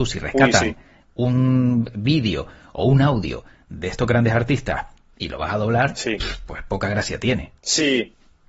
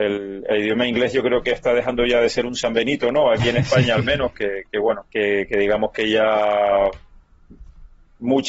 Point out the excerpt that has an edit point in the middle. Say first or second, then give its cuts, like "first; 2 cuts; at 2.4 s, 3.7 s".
second; 1 cut; at 5.1 s